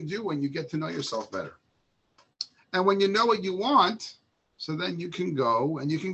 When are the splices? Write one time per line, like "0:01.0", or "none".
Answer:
0:02.6

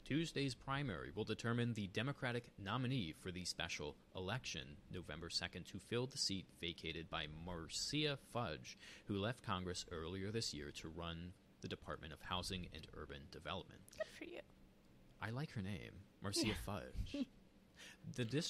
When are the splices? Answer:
none

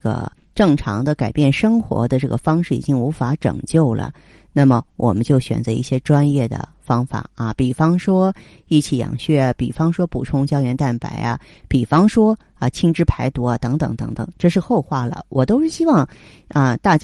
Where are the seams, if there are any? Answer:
none

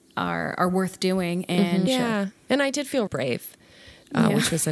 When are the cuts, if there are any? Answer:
0:01.9
0:03.1

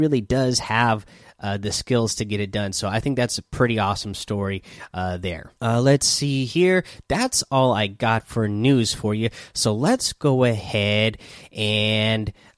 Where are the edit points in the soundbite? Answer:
0:05.6

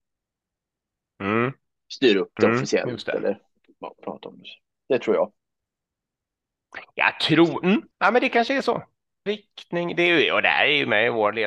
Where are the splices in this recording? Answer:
0:07.9
0:09.3

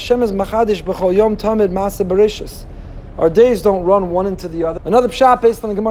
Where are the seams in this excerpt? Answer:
0:03.1
0:04.8

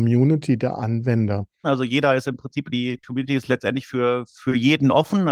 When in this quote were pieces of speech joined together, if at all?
0:01.6

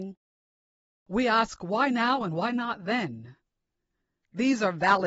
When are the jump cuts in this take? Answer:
none

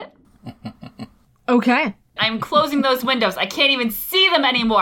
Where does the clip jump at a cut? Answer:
0:02.2

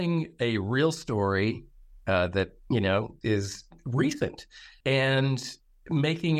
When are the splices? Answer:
0:03.2
0:04.8

